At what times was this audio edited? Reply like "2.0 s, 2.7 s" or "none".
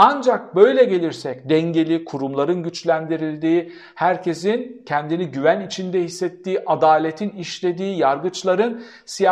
none